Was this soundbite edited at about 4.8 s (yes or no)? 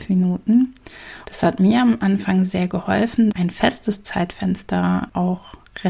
no